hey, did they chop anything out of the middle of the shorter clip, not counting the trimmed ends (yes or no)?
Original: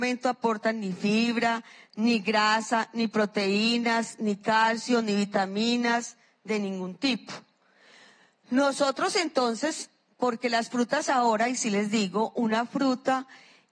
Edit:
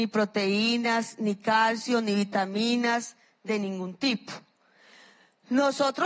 no